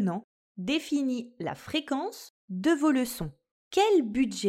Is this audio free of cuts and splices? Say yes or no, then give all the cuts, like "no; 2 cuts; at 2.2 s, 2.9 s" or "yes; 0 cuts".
no; 1 cut; at 3.5 s